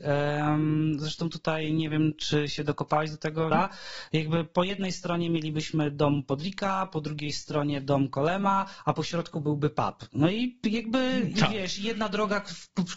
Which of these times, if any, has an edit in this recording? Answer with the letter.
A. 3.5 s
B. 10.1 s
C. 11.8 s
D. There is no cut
A